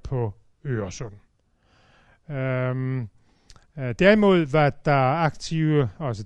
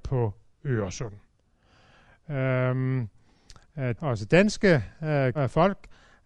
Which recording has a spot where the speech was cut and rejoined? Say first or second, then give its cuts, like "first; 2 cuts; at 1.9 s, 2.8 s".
second; 2 cuts; at 4.0 s, 5.3 s